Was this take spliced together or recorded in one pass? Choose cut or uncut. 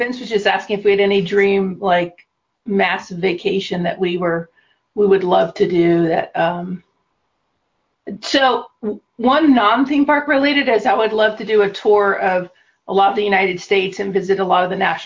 uncut